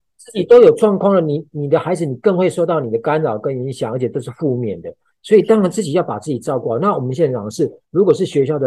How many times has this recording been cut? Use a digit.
0